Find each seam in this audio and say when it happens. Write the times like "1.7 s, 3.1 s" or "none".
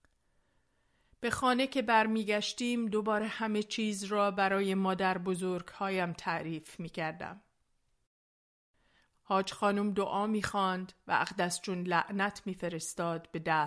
none